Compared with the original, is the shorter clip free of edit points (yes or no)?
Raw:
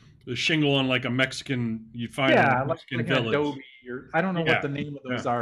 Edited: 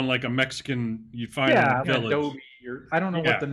no